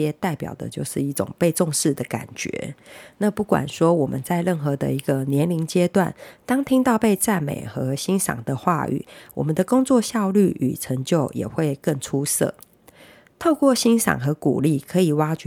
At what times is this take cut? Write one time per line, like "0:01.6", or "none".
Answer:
none